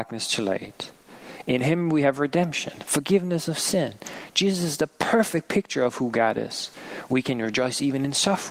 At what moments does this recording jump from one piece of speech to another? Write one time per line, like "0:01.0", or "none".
none